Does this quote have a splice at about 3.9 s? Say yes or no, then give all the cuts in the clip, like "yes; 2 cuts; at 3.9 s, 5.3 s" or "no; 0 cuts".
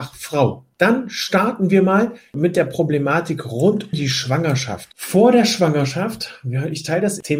yes; 1 cut; at 3.9 s